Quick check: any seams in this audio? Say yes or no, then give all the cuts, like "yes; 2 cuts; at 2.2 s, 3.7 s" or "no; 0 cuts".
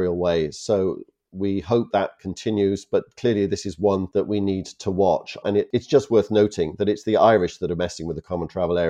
yes; 2 cuts; at 1.9 s, 5.4 s